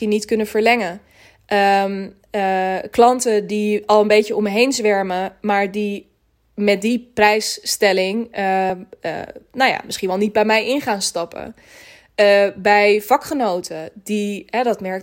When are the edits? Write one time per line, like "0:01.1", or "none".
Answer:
none